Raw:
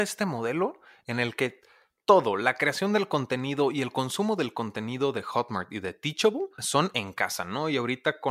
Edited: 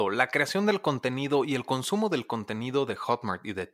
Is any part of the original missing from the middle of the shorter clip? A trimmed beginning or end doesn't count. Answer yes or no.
no